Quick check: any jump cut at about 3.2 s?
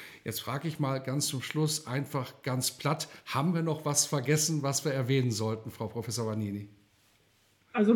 no; 0 cuts

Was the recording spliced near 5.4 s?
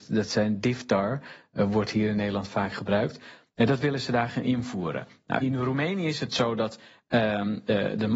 yes; 1 cut; at 5.4 s

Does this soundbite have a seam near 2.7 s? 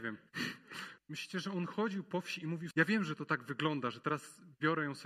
yes; 2 cuts; at 1.0 s, 2.7 s

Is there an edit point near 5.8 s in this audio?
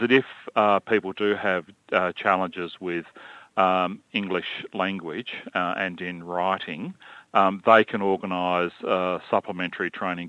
no; 0 cuts

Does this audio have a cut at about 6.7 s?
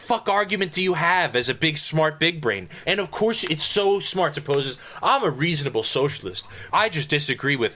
yes; 2 cuts; at 2.8 s, 6.7 s

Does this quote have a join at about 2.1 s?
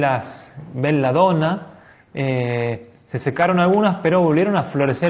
no; 0 cuts

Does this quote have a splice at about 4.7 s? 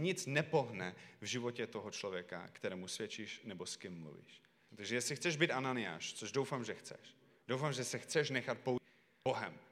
yes; 1 cut; at 4.7 s

